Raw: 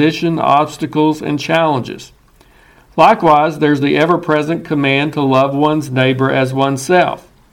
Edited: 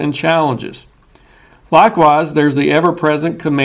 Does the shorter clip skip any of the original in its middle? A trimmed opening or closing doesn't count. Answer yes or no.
no